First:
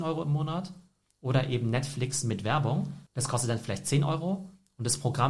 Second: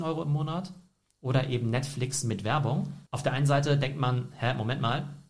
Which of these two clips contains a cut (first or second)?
second